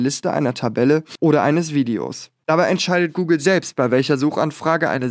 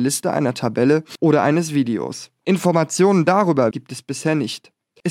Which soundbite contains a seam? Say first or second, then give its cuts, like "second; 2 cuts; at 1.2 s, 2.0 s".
second; 2 cuts; at 2.4 s, 3.7 s